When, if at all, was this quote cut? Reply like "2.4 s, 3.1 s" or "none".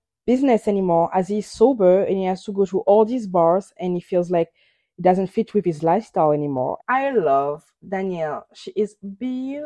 6.8 s

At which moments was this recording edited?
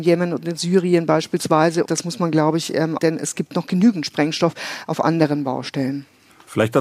1.9 s, 3.0 s

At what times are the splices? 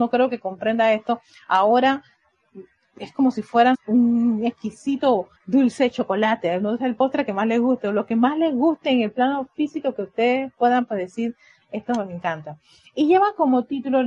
3.7 s, 5.4 s

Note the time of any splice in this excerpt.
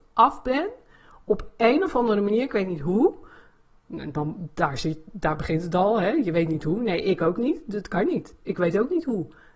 none

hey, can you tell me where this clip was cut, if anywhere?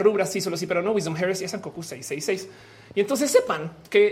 none

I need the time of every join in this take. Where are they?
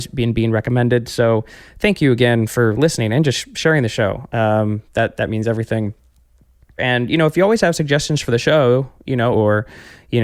6.8 s, 9.3 s

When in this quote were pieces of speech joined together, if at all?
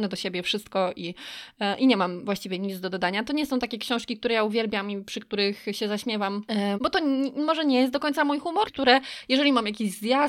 6.7 s, 8.6 s

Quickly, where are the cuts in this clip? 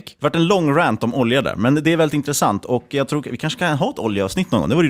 none

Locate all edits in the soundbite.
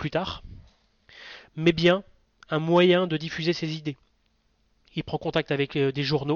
none

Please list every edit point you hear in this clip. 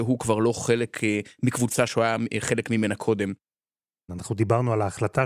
4.1 s

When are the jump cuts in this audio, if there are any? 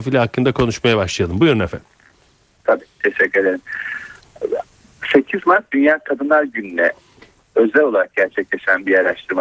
none

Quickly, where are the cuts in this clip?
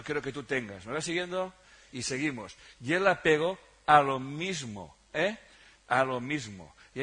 none

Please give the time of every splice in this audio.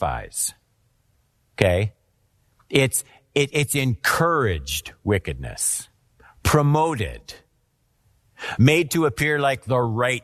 none

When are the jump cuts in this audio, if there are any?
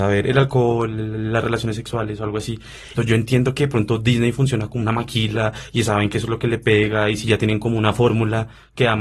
3.0 s

